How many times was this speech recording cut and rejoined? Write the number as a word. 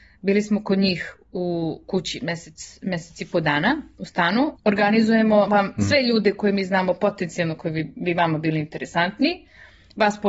one